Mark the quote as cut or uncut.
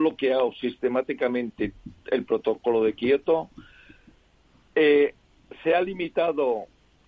uncut